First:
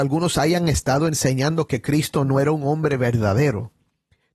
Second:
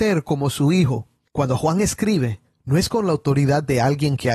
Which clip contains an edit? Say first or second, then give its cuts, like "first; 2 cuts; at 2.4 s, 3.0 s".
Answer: second; 1 cut; at 1.3 s